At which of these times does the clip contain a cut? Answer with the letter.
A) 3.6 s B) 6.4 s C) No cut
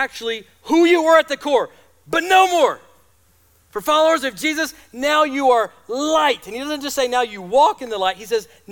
C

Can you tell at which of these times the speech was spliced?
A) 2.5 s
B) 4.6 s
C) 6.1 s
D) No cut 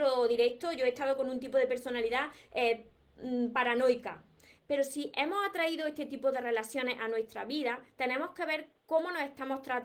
B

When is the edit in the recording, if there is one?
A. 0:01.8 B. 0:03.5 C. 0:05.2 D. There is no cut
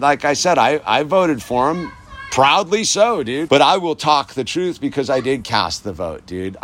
B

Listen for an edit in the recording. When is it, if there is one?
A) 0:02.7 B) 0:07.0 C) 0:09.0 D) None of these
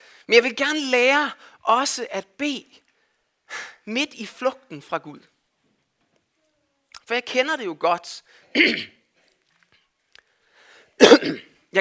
D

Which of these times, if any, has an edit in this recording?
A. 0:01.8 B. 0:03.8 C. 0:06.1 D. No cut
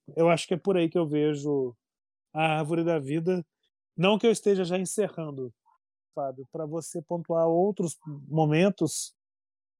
C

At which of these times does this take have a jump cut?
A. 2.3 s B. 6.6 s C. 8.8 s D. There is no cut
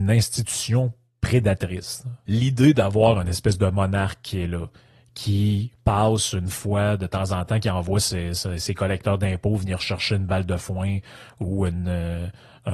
A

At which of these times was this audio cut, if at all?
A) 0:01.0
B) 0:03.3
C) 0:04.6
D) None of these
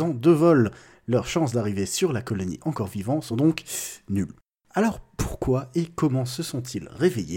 D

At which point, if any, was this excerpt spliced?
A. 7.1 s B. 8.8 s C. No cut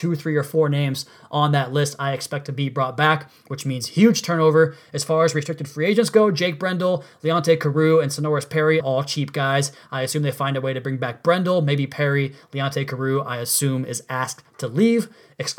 B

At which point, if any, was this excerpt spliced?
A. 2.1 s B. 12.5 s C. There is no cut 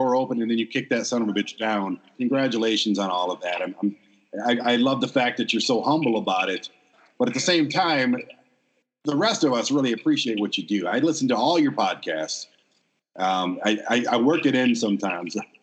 A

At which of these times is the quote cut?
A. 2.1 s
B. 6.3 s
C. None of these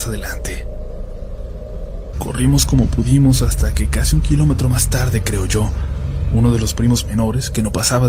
A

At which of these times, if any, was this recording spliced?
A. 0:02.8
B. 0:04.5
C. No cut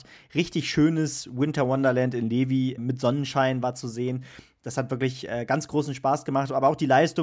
A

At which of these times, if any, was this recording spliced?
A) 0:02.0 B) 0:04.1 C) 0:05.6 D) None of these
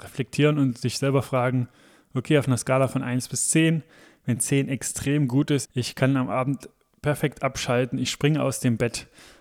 C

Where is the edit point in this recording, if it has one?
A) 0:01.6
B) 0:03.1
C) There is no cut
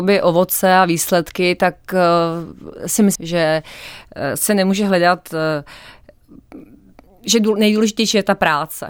B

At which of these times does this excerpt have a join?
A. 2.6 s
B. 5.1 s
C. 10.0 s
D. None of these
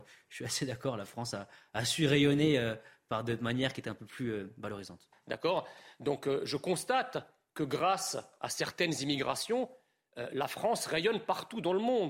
B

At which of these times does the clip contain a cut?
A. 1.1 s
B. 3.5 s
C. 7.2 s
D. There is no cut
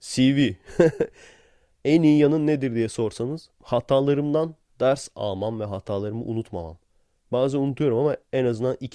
B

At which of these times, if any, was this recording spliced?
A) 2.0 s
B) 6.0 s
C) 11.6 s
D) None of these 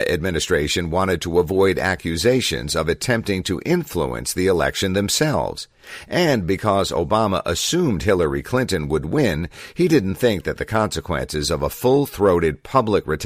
D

